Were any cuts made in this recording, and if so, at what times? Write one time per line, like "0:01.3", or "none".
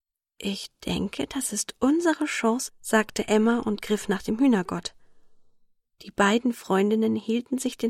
0:02.7